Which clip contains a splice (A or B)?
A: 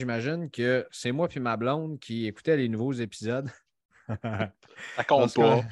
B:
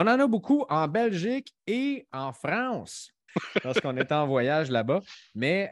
B